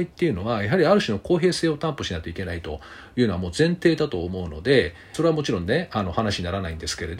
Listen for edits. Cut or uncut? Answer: cut